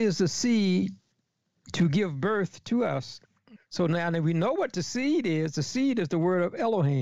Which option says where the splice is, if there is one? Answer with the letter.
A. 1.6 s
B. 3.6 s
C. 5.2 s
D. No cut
B